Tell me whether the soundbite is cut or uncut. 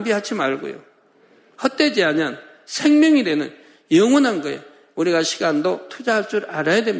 uncut